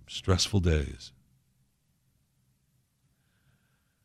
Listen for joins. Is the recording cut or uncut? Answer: uncut